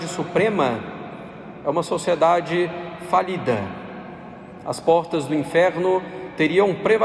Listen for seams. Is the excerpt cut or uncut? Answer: uncut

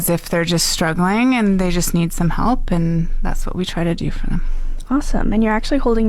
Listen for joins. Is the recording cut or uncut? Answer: uncut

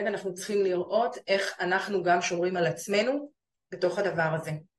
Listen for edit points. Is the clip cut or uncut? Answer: uncut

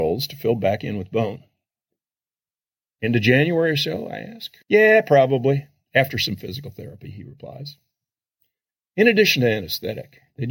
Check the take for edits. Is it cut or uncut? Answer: cut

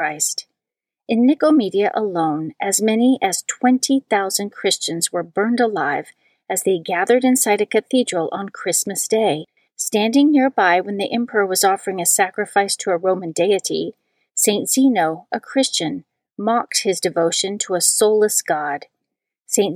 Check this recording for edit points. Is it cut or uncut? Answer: uncut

